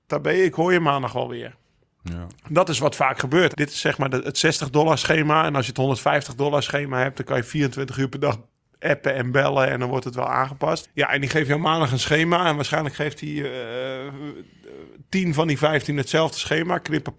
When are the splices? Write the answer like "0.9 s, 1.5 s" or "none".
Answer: 3.5 s, 10.8 s